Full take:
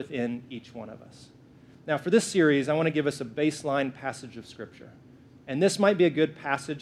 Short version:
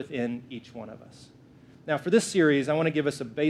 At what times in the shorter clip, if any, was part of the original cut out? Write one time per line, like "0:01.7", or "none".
none

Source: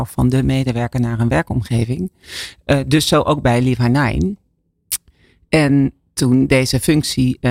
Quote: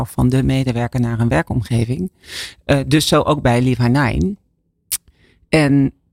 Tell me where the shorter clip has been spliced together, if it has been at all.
none

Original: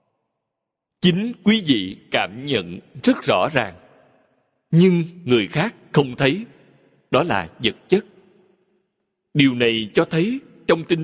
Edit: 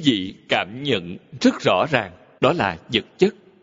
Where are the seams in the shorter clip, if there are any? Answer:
0:02.4

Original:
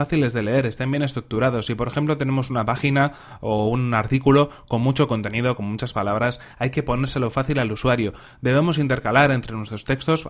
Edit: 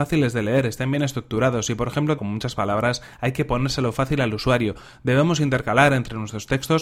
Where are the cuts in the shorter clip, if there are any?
0:02.2

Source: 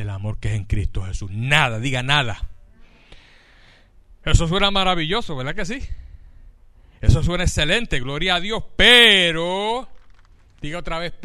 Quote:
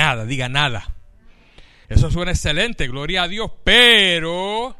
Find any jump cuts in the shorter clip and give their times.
0:01.8

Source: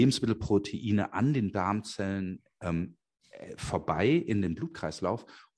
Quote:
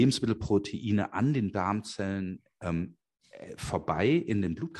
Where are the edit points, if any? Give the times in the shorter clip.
none

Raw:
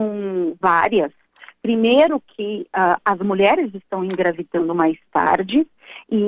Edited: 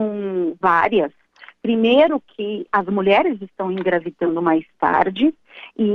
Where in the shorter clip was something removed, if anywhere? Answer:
0:02.7

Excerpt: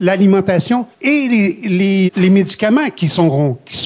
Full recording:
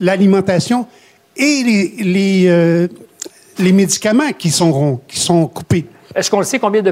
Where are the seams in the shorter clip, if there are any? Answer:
0:00.9
0:02.1

